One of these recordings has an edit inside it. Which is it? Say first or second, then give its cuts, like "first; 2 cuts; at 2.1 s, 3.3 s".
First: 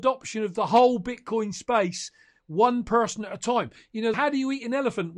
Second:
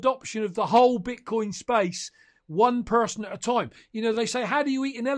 first; 1 cut; at 4.1 s